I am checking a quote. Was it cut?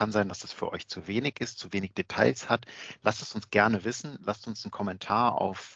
no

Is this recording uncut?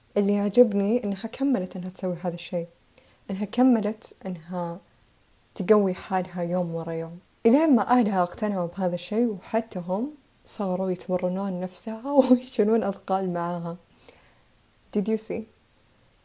yes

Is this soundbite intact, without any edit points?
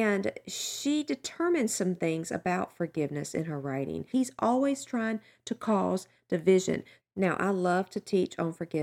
no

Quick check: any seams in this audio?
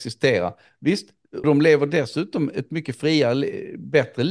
yes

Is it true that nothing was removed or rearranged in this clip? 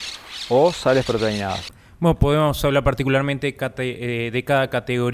yes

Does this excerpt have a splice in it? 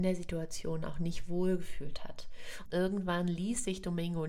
yes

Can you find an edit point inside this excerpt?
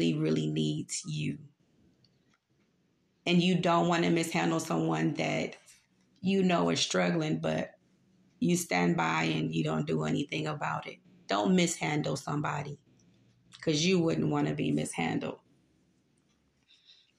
no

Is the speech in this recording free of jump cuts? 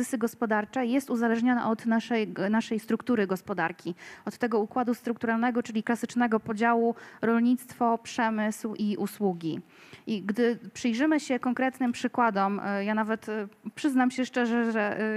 yes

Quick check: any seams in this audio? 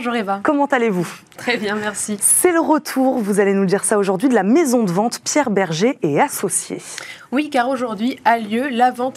no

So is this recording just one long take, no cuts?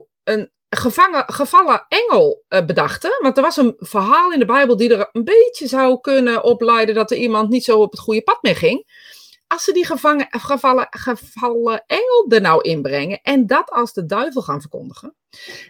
yes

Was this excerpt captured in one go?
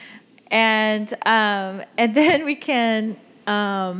yes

